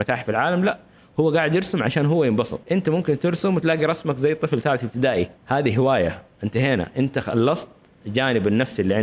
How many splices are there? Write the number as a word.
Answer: two